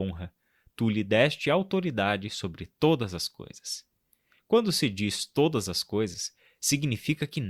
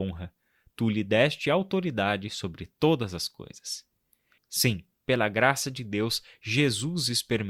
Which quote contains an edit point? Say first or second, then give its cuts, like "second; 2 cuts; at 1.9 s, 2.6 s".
second; 1 cut; at 4.4 s